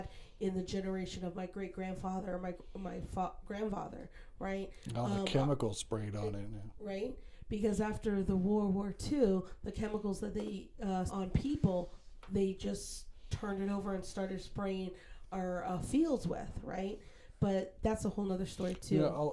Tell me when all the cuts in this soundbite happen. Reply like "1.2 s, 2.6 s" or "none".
11.1 s